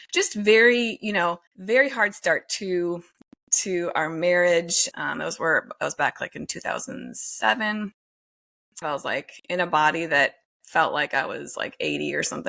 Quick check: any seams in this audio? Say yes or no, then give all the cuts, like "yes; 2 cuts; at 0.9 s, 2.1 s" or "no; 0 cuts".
yes; 3 cuts; at 1.5 s, 4.9 s, 8.8 s